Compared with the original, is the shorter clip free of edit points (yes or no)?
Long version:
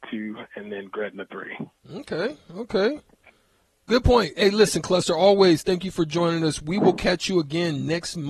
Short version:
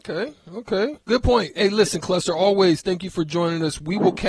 no